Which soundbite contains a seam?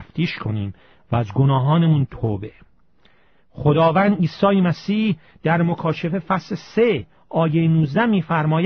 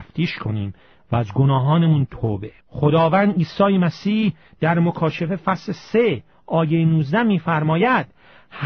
second; 1 cut; at 2.6 s

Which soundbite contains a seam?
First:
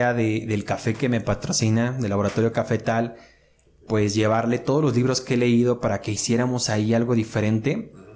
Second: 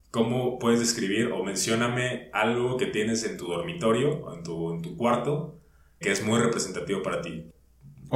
second; 1 cut; at 6.0 s

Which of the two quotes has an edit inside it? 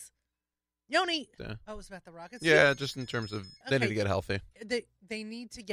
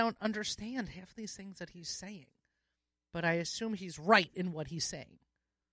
first; 2 cuts; at 1.4 s, 3.6 s

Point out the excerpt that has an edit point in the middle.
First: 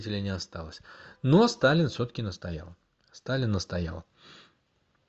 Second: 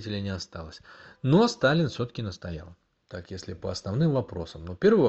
second; 1 cut; at 3.0 s

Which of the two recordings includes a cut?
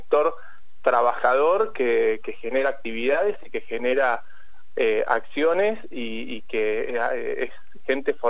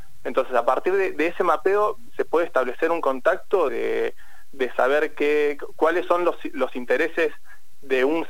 second; 1 cut; at 3.7 s

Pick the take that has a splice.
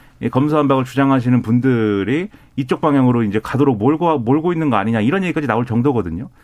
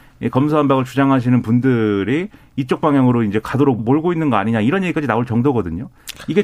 second; 1 cut; at 3.8 s

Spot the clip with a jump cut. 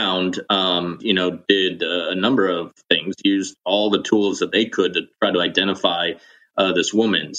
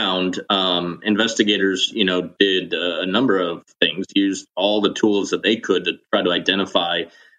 first; 1 cut; at 1.0 s

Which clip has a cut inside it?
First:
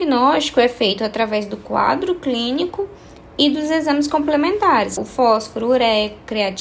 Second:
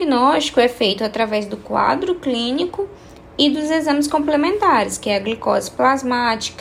first; 1 cut; at 5.0 s

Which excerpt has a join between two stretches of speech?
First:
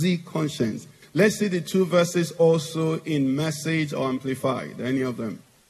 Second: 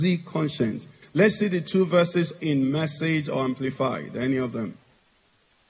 second; 1 cut; at 2.4 s

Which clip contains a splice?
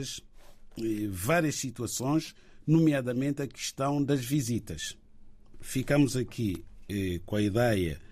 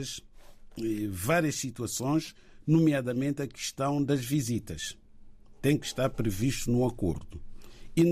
first; 1 cut; at 5.5 s

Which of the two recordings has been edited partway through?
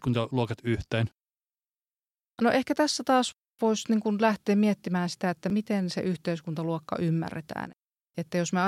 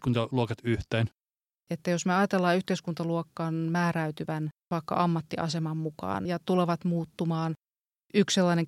second; 2 cuts; at 1.6 s, 6.2 s

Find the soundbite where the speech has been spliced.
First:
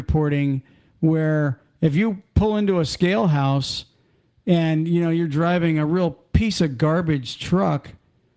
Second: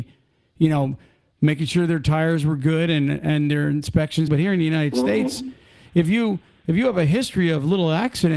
second; 1 cut; at 4.3 s

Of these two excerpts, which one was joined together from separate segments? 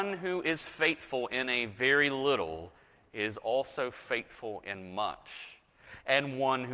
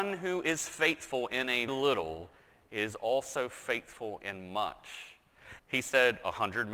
second; 2 cuts; at 1.7 s, 5.6 s

